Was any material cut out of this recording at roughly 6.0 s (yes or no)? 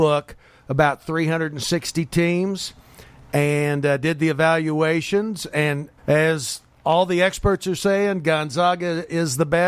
yes